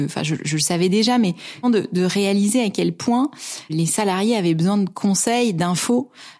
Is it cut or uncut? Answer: cut